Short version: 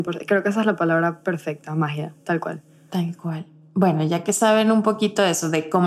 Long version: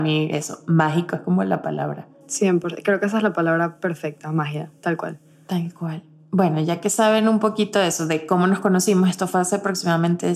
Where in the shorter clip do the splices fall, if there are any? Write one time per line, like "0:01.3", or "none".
none